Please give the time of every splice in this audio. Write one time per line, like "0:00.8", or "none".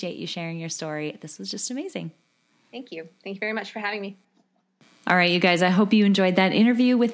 none